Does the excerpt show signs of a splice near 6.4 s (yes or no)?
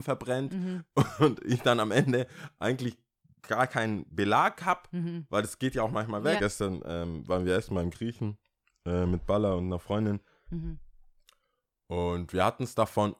yes